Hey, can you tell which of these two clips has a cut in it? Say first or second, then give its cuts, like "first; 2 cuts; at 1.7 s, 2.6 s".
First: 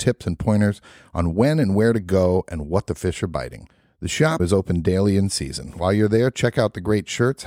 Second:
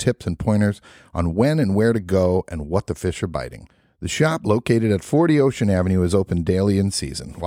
first; 1 cut; at 4.4 s